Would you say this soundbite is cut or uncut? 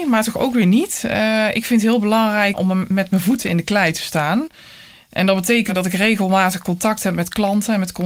uncut